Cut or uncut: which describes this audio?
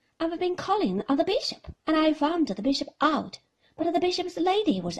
cut